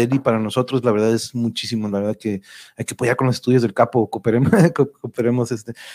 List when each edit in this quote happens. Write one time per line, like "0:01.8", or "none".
none